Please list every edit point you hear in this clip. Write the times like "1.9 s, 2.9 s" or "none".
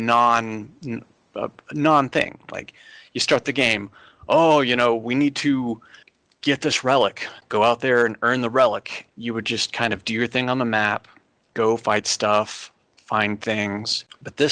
9.1 s